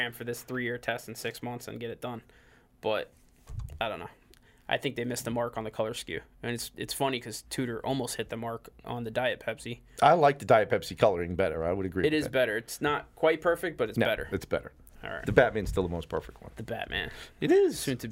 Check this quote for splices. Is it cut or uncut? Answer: uncut